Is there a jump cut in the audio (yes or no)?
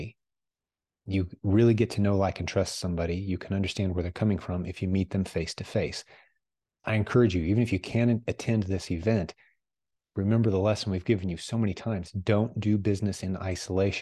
no